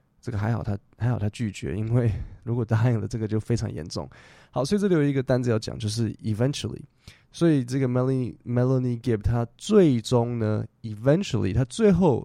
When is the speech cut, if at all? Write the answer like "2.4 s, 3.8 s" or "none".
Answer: none